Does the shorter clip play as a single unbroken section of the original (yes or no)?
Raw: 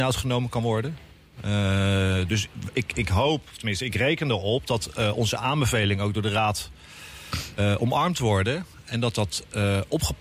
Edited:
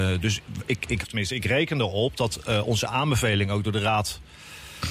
no